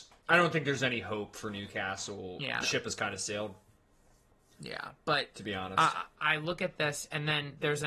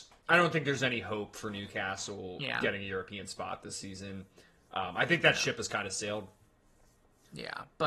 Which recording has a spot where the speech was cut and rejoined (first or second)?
first